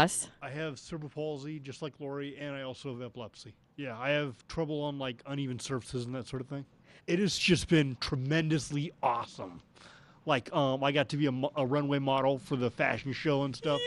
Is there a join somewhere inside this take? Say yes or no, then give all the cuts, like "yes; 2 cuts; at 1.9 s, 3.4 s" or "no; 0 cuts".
yes; 2 cuts; at 3.7 s, 7.0 s